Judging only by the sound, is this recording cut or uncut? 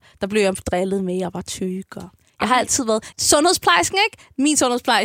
cut